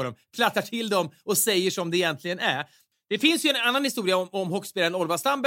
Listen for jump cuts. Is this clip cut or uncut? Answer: uncut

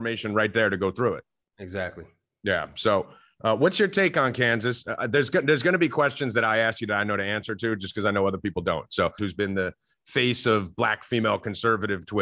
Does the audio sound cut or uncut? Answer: cut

